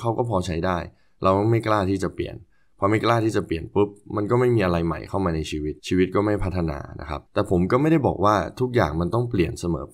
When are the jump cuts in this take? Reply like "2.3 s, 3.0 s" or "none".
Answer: 5.8 s, 7.3 s